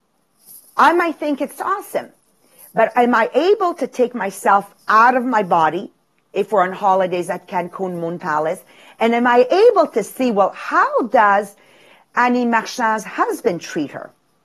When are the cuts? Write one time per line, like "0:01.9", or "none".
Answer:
none